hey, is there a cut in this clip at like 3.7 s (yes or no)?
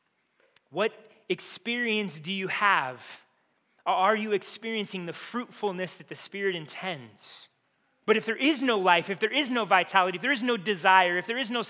no